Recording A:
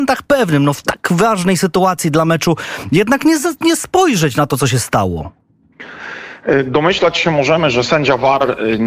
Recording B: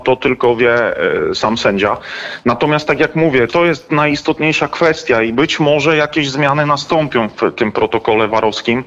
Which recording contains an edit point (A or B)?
B